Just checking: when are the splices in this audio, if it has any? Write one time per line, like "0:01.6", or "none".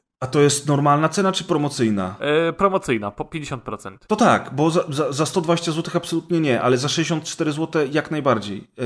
0:04.0